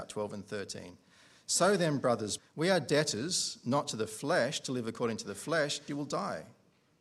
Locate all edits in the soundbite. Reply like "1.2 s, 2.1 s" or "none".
2.4 s, 5.9 s

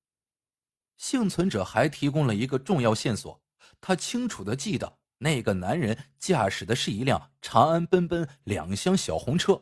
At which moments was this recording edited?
none

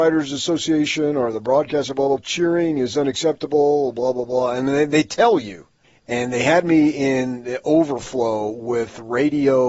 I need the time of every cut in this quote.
2.2 s, 5.8 s

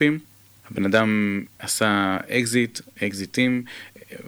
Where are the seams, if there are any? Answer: none

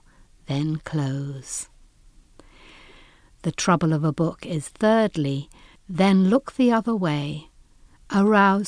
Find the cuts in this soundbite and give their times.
5.8 s

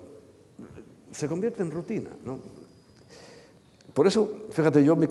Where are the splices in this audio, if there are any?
none

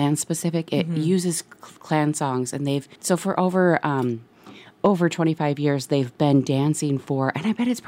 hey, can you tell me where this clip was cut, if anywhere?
3.0 s

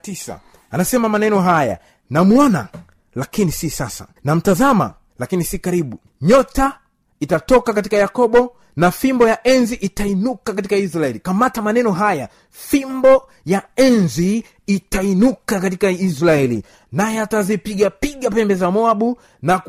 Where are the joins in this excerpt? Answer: 4.2 s

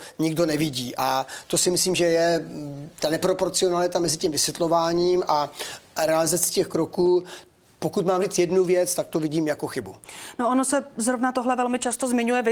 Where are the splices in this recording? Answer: none

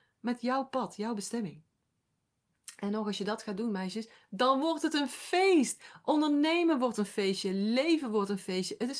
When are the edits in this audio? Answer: none

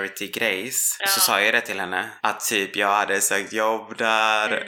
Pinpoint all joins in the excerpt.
1.0 s

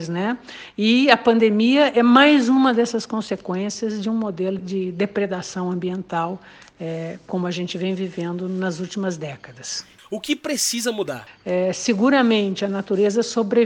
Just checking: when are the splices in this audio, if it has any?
4.6 s, 10.0 s, 11.3 s

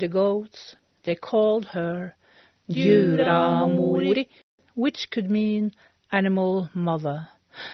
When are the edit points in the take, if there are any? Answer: none

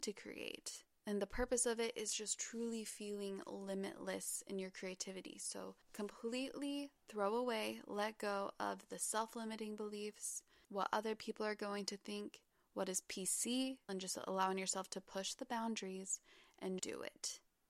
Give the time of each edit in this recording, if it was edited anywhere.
13.9 s, 16.8 s

